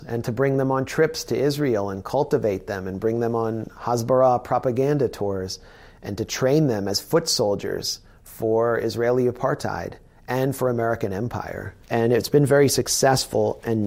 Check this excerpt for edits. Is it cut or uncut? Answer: cut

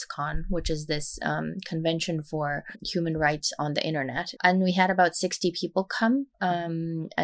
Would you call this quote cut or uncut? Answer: cut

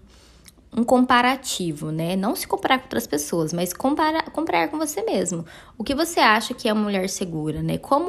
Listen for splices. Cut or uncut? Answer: uncut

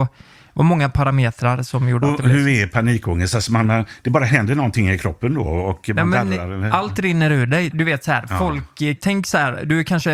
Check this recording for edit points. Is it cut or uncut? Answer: cut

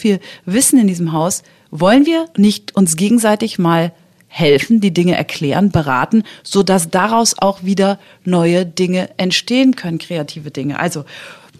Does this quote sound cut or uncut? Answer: cut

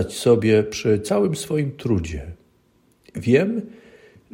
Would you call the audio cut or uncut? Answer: uncut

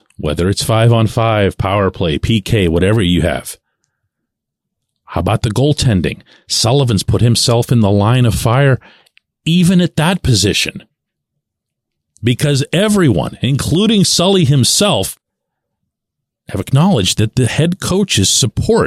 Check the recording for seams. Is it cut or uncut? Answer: uncut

